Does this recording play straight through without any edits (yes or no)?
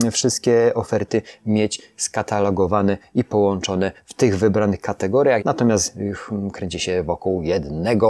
no